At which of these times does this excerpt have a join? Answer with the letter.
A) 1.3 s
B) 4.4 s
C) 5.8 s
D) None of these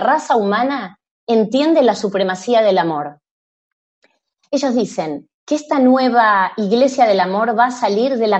B